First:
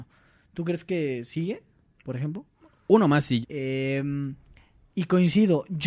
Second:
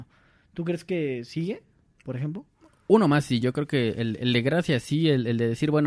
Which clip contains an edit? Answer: first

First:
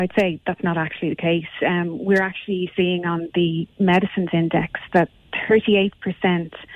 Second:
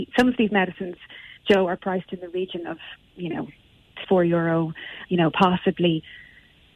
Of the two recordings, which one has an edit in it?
second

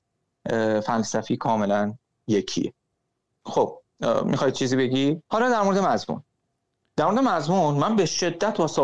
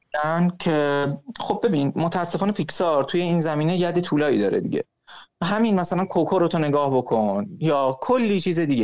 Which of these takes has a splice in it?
first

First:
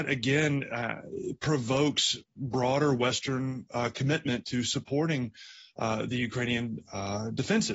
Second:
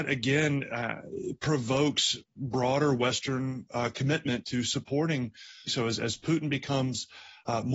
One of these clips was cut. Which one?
second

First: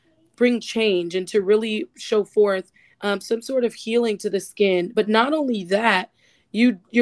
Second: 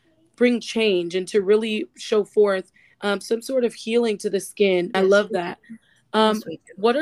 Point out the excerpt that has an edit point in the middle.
second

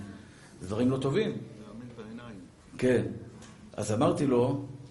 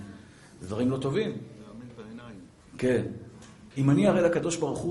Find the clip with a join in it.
second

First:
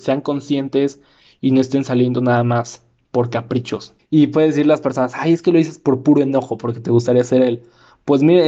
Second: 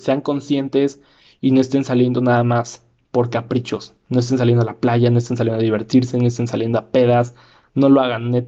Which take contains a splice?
first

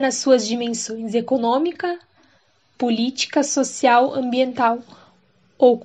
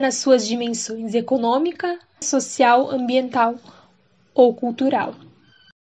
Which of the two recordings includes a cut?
second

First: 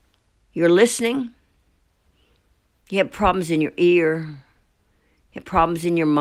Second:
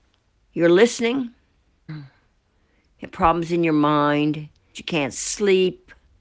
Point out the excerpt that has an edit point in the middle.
second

